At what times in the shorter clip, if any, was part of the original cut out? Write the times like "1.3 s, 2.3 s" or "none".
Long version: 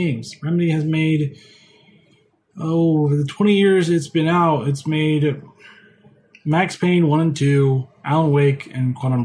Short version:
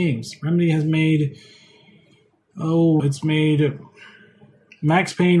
3.0 s